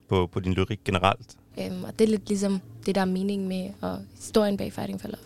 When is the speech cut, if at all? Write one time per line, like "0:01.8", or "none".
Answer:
0:01.5